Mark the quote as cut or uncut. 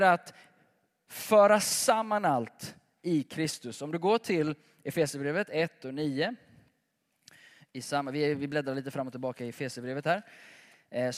uncut